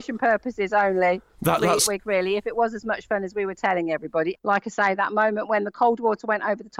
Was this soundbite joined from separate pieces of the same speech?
yes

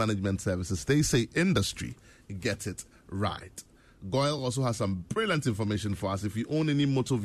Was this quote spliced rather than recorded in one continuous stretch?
no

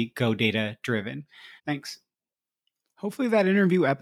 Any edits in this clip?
yes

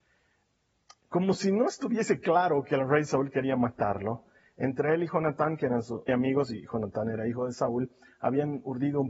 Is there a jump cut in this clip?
yes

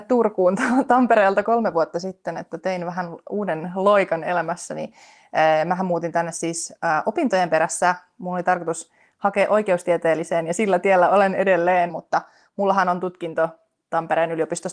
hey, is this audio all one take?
no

